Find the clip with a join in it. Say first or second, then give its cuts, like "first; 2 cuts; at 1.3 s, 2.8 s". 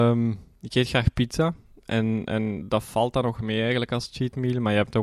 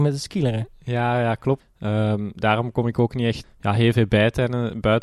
second; 2 cuts; at 1.6 s, 3.4 s